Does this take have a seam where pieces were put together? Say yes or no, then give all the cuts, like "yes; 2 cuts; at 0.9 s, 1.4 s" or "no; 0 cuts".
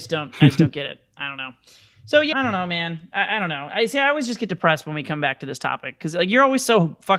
yes; 1 cut; at 2.3 s